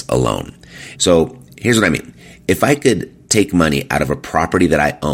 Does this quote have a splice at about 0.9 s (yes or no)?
yes